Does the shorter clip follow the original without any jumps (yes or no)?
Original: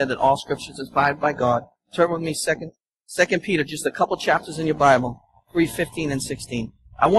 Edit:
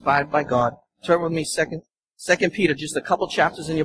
yes